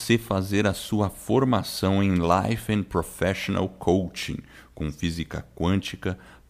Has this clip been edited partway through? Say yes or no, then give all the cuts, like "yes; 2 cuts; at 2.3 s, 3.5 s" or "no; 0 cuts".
no; 0 cuts